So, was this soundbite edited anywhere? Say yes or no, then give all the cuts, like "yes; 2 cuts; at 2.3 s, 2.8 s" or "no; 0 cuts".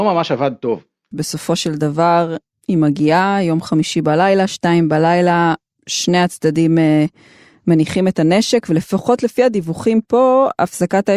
yes; 1 cut; at 1.1 s